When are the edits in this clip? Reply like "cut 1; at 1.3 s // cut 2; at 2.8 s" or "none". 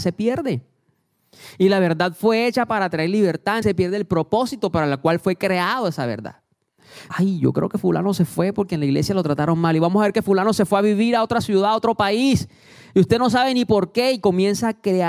cut 1; at 3.6 s // cut 2; at 7.1 s